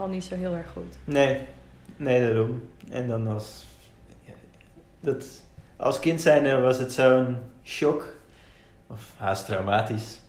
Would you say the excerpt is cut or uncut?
uncut